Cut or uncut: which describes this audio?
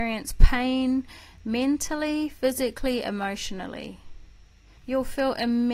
cut